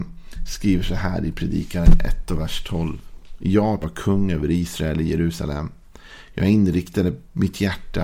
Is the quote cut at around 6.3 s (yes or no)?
no